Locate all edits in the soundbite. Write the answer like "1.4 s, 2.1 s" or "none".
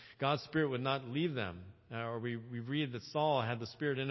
none